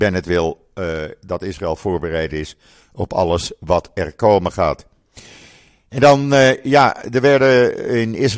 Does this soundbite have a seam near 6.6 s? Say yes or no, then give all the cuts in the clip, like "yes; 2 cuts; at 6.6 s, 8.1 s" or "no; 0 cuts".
no; 0 cuts